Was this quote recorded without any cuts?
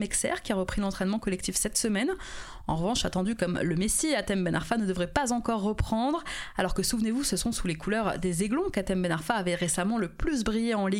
yes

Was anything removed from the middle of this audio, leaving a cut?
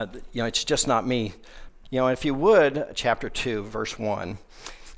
yes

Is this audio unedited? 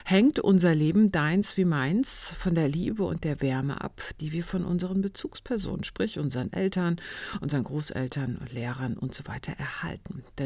yes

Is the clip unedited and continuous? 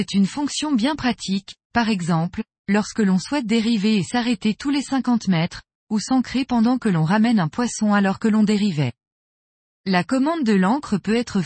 yes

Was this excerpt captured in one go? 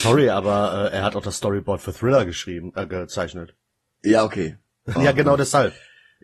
no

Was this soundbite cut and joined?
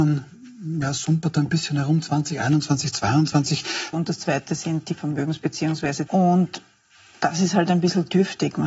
yes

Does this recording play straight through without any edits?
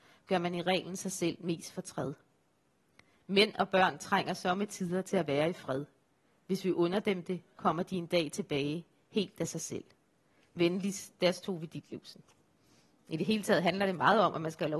yes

